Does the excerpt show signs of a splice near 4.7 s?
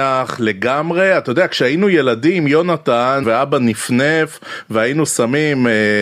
no; 1 cut; at 3.2 s

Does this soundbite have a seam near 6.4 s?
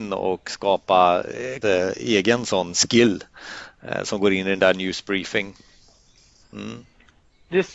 yes; 2 cuts; at 1.6 s, 6.4 s

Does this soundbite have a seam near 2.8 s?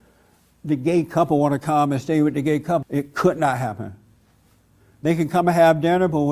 yes; 1 cut; at 2.8 s

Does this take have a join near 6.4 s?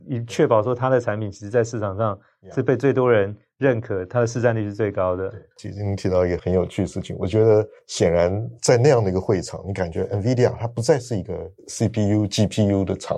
yes; 1 cut; at 6.4 s

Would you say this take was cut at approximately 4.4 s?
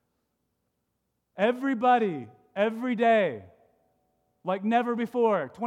no; 1 cut; at 1.3 s

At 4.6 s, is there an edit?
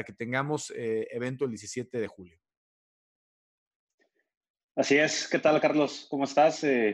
no; 0 cuts

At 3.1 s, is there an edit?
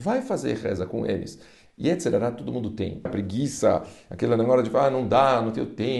yes; 1 cut; at 3.1 s

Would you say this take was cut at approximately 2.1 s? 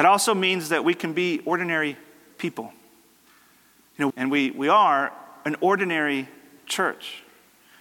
no; 1 cut; at 4.1 s

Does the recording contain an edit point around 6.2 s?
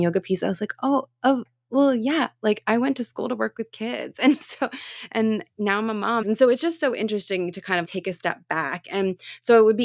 yes; 2 cuts; at 6.2 s, 7.8 s

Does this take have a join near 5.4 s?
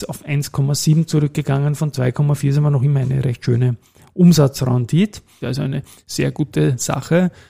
yes; 1 cut; at 5.4 s

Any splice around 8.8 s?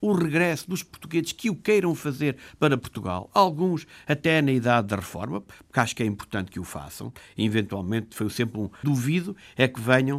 yes; 1 cut; at 8.8 s

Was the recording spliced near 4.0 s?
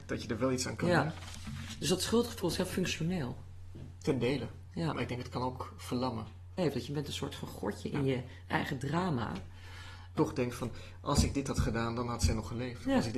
no; 2 cuts; at 6.6 s, 10.2 s

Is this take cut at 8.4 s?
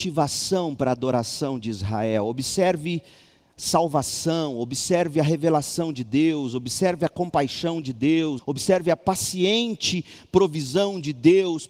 yes; 1 cut; at 8.4 s

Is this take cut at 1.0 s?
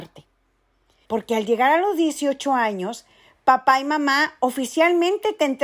yes; 1 cut; at 1.0 s

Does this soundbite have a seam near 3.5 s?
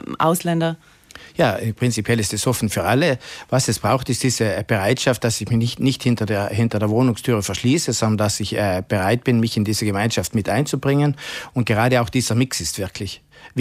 no; 1 cut; at 11.5 s

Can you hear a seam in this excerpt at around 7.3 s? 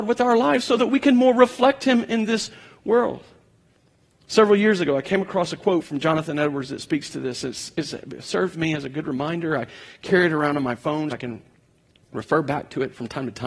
no; 1 cut; at 11.1 s

